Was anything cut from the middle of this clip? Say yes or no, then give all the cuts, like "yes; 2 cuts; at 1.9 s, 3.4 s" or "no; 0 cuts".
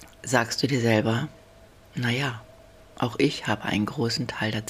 no; 0 cuts